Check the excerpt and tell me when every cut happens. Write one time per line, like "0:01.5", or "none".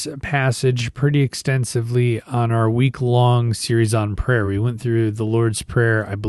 none